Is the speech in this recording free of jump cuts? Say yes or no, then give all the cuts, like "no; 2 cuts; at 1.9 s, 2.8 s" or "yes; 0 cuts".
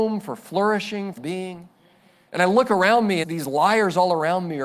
no; 2 cuts; at 1.2 s, 3.2 s